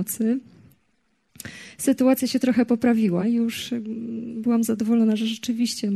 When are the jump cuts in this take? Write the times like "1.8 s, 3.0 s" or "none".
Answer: 3.2 s